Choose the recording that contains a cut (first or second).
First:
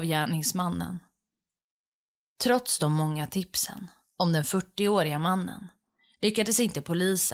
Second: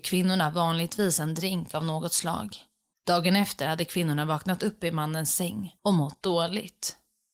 second